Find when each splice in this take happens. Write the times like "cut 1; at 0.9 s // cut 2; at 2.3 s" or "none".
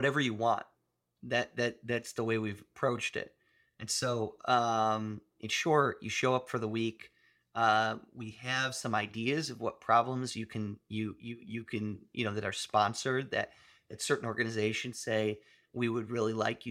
none